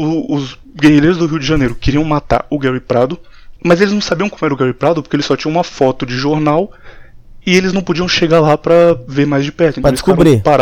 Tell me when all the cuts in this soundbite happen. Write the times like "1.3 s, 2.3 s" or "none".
3.6 s